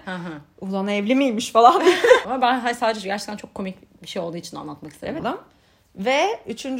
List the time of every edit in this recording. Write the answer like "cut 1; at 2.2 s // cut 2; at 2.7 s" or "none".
cut 1; at 2.2 s // cut 2; at 5.2 s